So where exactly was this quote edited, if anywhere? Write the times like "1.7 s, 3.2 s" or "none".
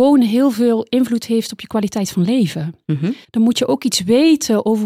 3.2 s